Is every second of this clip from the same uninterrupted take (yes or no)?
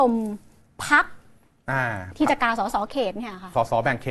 yes